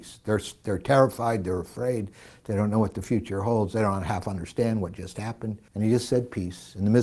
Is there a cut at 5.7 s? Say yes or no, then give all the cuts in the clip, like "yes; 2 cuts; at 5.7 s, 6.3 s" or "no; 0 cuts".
yes; 1 cut; at 5.7 s